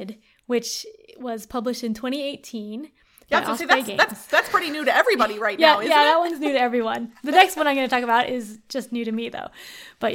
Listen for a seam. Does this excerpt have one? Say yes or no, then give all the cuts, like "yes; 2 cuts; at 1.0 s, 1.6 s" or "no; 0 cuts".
no; 0 cuts